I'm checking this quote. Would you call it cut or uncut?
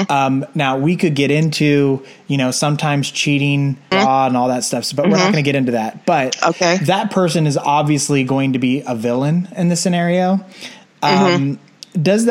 cut